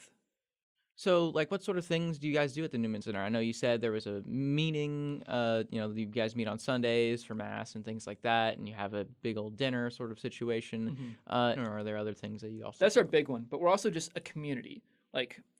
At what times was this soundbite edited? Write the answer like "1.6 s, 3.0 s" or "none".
11.6 s